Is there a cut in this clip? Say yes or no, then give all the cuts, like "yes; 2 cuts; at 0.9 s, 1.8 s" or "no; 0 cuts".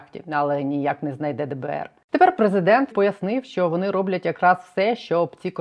yes; 1 cut; at 2.9 s